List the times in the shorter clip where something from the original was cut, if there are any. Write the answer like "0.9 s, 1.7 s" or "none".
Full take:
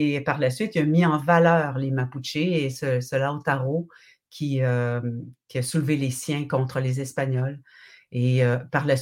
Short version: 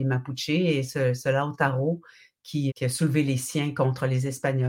2.7 s